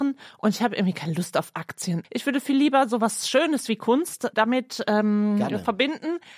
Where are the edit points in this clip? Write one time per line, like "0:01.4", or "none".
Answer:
0:02.0